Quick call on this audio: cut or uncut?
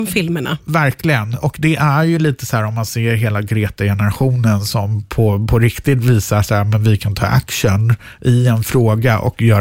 uncut